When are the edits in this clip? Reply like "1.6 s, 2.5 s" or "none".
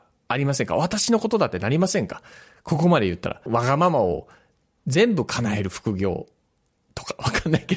3.5 s